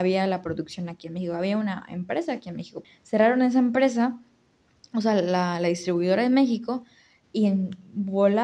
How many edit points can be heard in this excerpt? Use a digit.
1